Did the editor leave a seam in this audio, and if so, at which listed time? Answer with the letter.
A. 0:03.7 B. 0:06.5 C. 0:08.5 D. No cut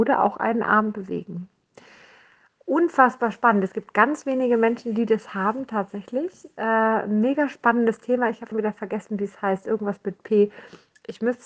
C